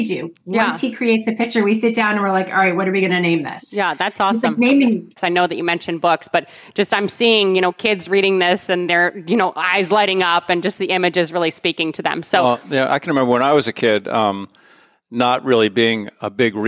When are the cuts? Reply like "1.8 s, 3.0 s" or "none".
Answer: 5.2 s